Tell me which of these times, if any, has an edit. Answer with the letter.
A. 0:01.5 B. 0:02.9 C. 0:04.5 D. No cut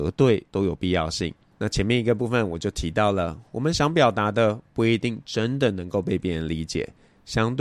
A